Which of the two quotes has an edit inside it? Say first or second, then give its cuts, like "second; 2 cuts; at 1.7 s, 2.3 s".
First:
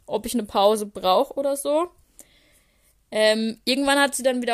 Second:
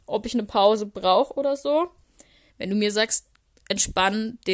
second; 1 cut; at 2.5 s